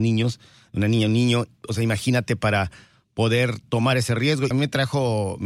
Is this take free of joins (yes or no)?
no